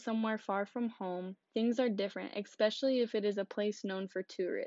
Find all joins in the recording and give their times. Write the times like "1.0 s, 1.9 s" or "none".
none